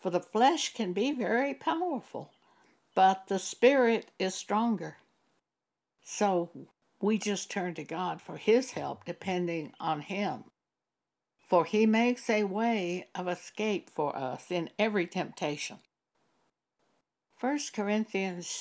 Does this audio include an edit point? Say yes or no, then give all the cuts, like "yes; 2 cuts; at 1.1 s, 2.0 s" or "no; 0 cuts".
no; 0 cuts